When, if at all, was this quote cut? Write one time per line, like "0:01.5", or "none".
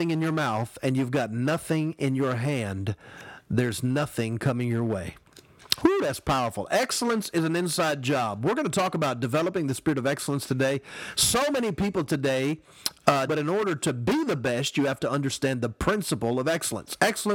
0:13.3